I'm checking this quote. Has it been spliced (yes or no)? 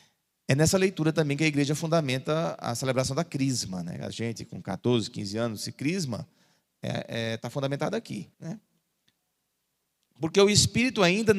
yes